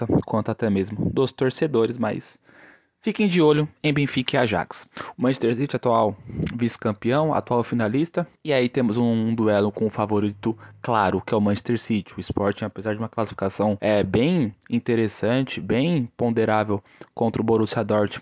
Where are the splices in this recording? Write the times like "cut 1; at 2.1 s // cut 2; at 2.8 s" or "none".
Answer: cut 1; at 5.1 s